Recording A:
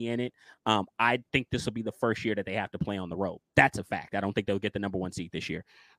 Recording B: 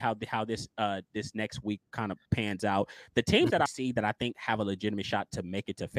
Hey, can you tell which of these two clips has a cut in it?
B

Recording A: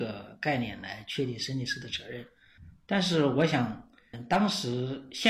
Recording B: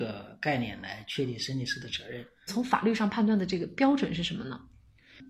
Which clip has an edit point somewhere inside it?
B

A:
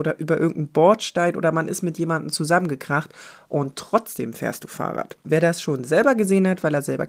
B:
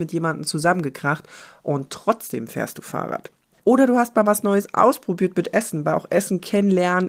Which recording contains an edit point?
A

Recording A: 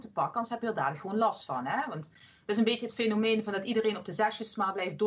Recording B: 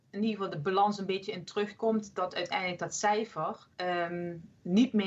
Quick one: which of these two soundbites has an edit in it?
B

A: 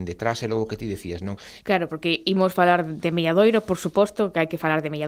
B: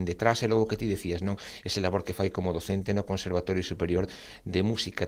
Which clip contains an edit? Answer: A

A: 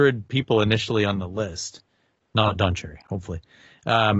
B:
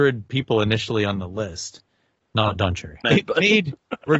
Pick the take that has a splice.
B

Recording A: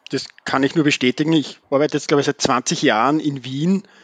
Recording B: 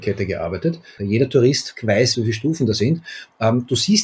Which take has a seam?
B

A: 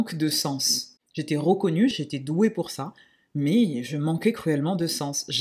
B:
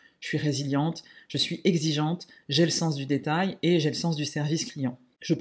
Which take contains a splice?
A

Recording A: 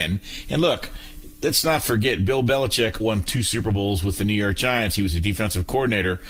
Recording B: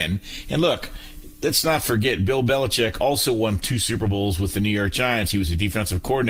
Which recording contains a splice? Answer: A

